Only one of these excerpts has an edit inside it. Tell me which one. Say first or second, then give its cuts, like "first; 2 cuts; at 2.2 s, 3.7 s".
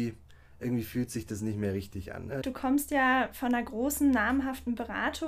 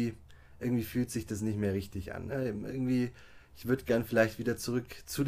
first; 1 cut; at 2.4 s